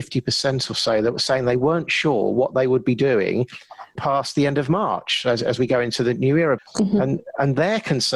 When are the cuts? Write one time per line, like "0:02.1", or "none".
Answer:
0:04.0
0:06.6